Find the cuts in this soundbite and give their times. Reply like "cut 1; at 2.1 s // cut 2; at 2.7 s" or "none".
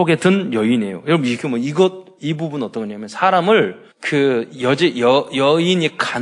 cut 1; at 3.9 s